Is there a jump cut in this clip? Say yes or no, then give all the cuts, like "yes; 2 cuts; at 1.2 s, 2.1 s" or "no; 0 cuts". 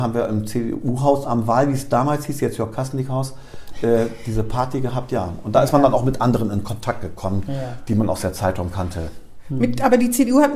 no; 0 cuts